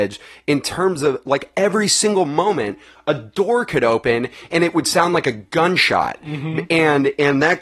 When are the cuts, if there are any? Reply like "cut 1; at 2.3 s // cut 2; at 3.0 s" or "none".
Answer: none